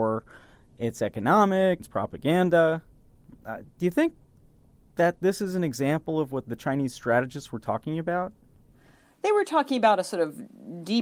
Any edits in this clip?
yes; 1 cut; at 1.8 s

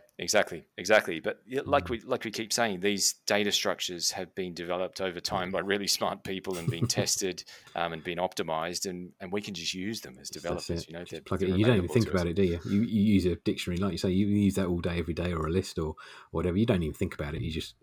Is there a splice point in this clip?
no; 0 cuts

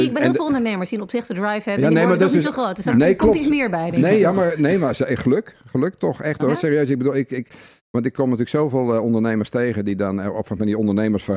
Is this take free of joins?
yes; 0 cuts

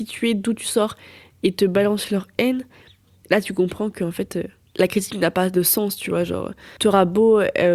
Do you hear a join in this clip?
no; 0 cuts

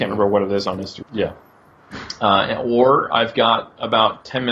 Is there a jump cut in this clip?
yes; 1 cut; at 1.0 s

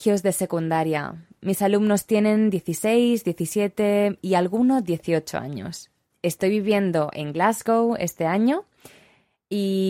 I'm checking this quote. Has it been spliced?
yes; 1 cut; at 6.1 s

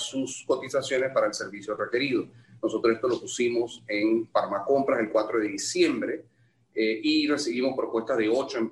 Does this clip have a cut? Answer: no; 0 cuts

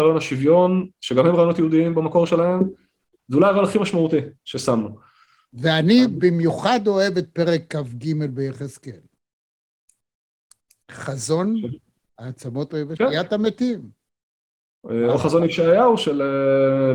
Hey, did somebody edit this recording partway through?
yes; 1 cut; at 13.0 s

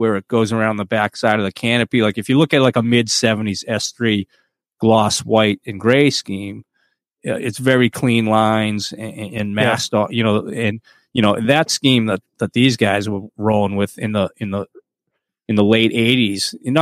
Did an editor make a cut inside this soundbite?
no; 0 cuts

